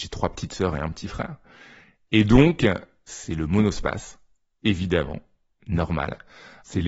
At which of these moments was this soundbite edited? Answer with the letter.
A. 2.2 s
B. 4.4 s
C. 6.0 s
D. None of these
D